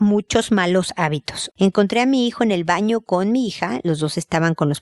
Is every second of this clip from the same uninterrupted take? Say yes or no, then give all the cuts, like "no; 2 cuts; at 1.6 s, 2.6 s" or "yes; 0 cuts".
no; 1 cut; at 1.5 s